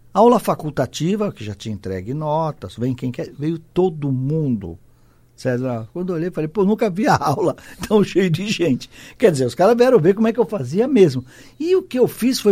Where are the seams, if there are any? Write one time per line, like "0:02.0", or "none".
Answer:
none